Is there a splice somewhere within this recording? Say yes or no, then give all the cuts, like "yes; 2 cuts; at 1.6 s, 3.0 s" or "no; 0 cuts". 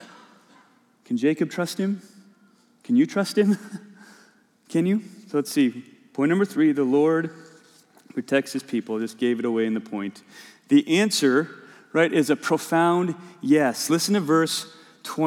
no; 0 cuts